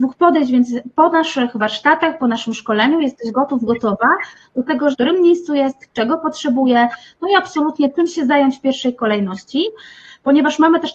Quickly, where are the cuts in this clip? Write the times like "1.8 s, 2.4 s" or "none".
4.9 s